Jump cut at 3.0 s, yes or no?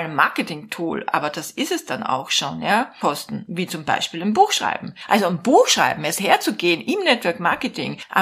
yes